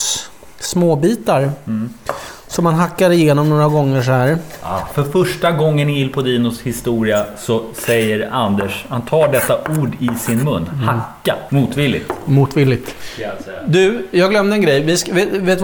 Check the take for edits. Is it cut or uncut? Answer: cut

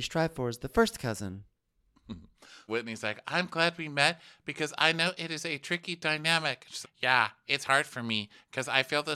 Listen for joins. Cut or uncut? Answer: cut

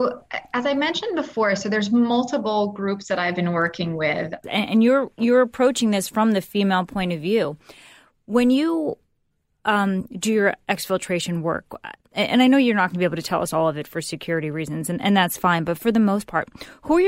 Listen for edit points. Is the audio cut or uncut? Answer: cut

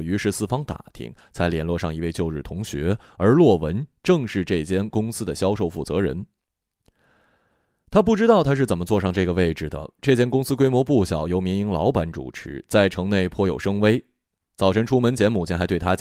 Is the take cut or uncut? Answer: uncut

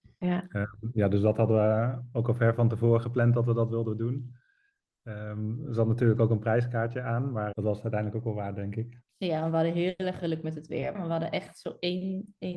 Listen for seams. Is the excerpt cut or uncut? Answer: cut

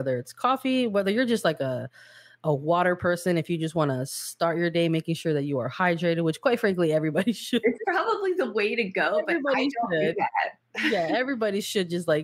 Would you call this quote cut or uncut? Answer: uncut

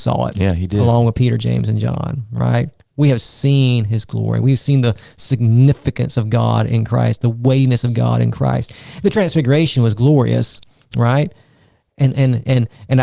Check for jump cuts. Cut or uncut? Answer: uncut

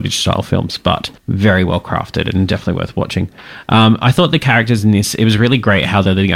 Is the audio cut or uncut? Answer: cut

